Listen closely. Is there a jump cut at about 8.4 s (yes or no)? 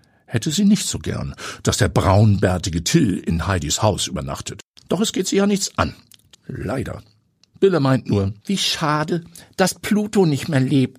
yes